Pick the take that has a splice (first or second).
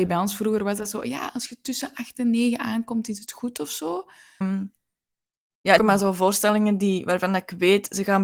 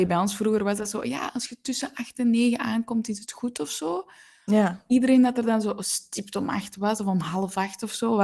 first